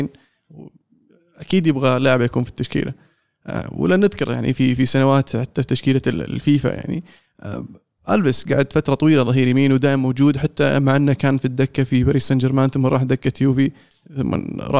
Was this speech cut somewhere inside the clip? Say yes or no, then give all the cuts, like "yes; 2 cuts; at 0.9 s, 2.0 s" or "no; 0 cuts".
no; 0 cuts